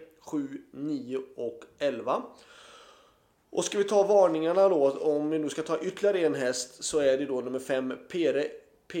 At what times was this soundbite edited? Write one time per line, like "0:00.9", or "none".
none